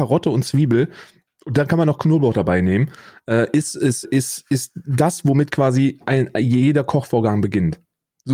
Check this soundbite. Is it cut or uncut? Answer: cut